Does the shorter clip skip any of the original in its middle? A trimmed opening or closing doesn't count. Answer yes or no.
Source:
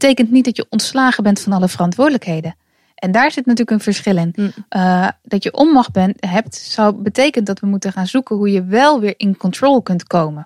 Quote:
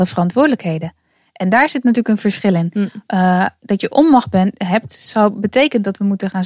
no